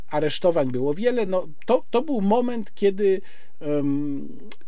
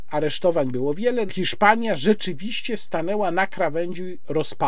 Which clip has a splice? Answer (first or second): second